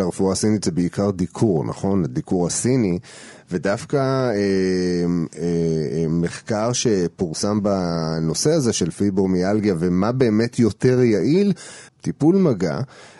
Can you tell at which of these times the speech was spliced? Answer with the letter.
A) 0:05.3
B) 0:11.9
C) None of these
B